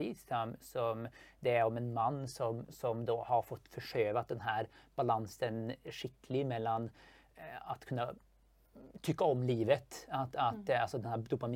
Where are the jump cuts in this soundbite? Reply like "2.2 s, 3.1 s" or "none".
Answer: none